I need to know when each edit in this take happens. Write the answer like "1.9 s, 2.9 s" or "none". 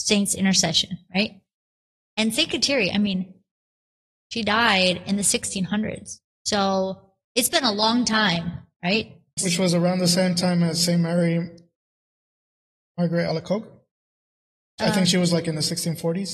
9.4 s